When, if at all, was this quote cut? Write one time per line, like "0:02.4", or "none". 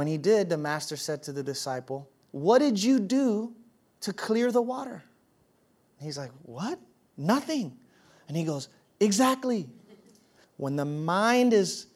0:10.4